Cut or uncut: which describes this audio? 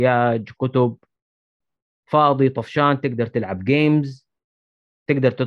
uncut